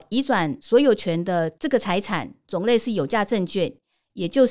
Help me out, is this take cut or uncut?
uncut